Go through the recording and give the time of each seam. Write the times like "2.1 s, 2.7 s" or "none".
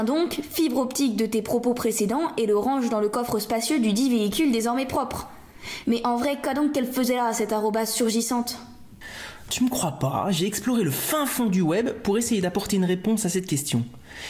none